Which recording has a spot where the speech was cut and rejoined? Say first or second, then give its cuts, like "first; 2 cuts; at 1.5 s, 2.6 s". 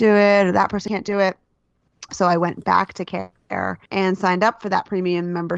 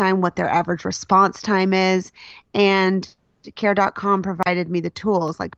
first; 2 cuts; at 2.1 s, 3.9 s